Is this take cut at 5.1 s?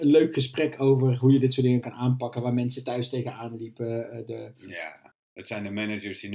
yes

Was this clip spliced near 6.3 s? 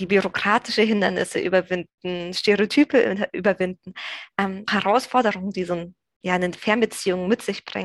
no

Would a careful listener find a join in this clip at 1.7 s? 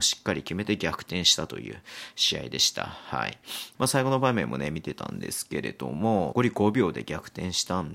no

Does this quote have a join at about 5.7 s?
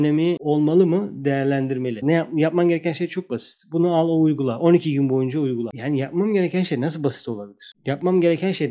no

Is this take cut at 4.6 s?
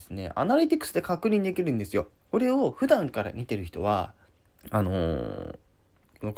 yes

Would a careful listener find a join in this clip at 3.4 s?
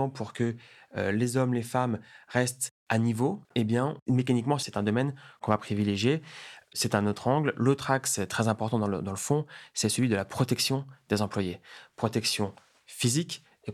yes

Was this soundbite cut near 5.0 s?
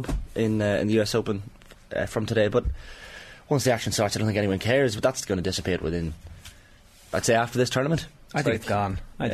yes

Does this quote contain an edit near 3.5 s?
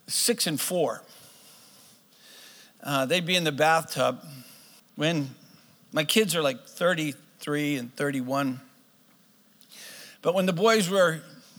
no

